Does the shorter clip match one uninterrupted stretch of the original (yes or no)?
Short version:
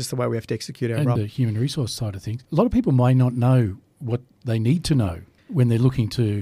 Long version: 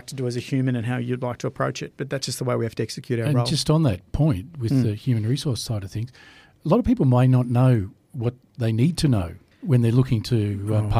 no